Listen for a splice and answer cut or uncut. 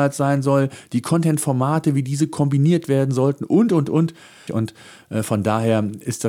cut